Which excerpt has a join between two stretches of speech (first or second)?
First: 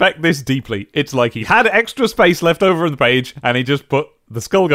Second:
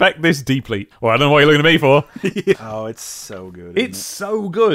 second